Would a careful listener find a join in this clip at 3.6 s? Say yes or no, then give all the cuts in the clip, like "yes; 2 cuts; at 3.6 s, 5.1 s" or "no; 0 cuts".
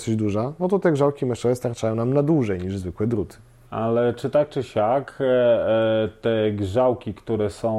yes; 1 cut; at 3.6 s